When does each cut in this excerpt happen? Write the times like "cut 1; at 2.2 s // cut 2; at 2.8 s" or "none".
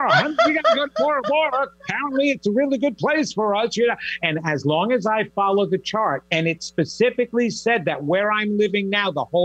cut 1; at 4.2 s